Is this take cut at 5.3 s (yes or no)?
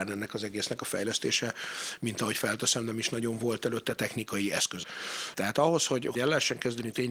yes